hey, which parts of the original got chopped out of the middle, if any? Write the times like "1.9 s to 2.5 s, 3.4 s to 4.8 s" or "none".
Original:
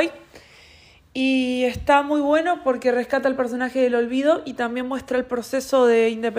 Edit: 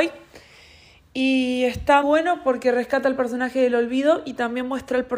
2.0 s to 2.2 s